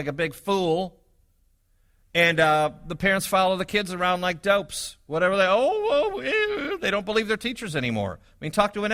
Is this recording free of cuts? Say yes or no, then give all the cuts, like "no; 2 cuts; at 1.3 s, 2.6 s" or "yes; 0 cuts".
yes; 0 cuts